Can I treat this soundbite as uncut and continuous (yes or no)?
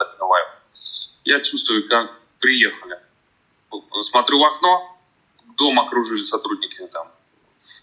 yes